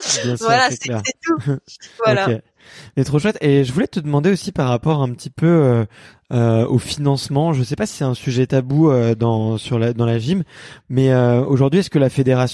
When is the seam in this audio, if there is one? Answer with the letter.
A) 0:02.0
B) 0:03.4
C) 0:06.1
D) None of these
A